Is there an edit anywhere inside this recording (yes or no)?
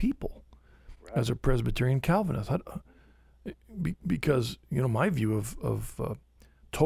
no